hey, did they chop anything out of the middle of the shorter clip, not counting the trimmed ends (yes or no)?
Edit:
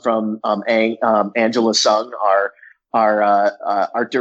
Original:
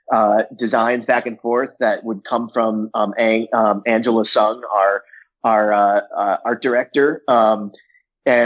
no